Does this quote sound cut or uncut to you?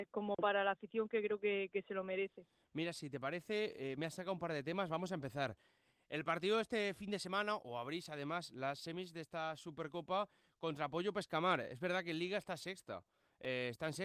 uncut